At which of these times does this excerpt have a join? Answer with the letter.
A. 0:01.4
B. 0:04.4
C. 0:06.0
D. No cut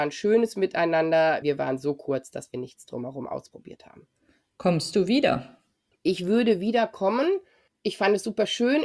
A